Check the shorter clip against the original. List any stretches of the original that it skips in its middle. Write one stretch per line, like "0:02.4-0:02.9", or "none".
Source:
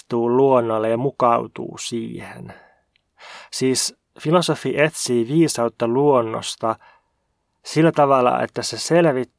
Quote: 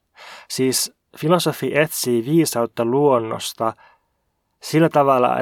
none